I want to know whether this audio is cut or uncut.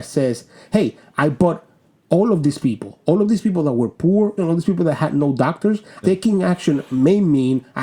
cut